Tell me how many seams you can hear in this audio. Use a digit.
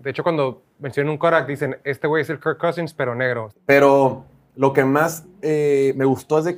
1